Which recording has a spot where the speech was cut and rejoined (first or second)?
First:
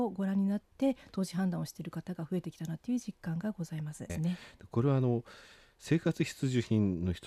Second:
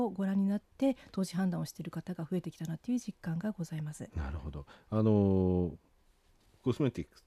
first